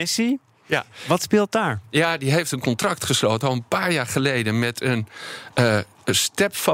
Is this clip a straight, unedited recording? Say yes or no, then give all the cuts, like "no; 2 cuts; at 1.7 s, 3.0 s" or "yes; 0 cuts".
yes; 0 cuts